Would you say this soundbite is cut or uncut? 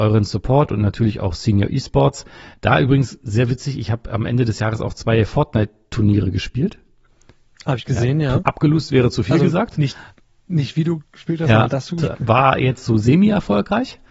cut